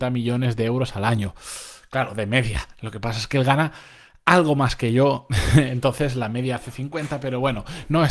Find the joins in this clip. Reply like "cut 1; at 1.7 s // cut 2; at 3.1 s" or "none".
none